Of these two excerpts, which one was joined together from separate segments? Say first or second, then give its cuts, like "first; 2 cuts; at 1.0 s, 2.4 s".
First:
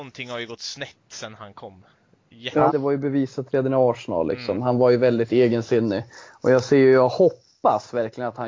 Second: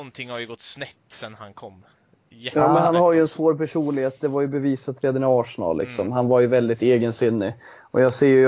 first; 1 cut; at 2.7 s